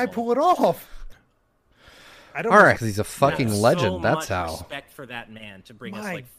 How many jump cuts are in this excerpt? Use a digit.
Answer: 2